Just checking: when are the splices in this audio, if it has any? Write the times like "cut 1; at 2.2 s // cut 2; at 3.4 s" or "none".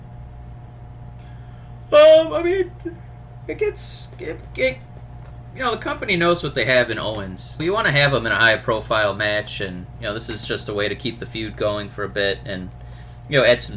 cut 1; at 7.6 s